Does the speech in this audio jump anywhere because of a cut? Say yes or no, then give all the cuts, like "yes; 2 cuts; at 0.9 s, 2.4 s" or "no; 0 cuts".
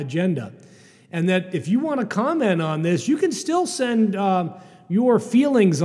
no; 0 cuts